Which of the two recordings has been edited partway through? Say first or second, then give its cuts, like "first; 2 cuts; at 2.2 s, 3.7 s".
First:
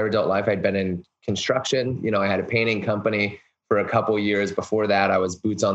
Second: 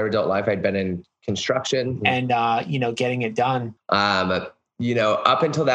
second; 2 cuts; at 2.0 s, 3.8 s